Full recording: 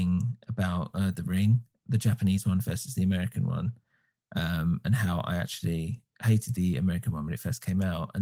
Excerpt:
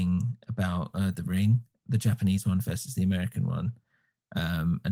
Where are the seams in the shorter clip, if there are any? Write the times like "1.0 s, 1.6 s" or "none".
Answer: none